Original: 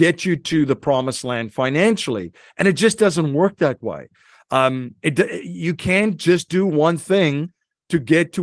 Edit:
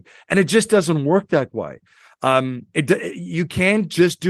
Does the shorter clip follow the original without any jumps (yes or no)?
yes